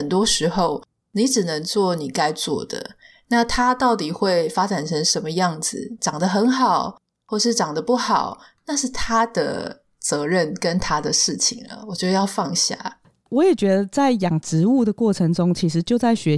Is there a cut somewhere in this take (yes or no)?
no